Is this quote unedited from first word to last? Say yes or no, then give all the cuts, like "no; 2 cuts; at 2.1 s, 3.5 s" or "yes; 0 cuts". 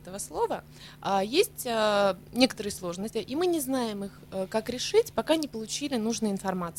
no; 1 cut; at 3.1 s